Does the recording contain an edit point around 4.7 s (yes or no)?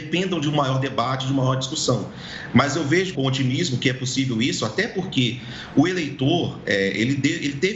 no